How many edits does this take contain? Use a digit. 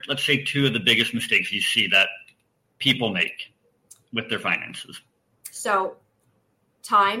1